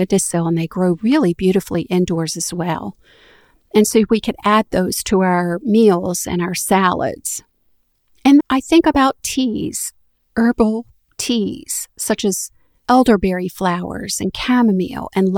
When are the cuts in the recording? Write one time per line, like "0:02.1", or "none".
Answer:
0:08.4